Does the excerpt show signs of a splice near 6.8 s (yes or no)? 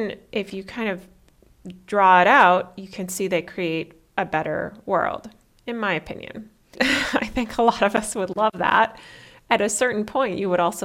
yes